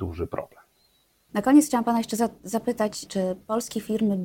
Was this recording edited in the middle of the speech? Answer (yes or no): yes